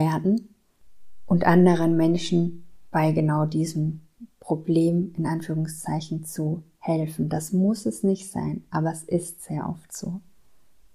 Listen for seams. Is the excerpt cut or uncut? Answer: uncut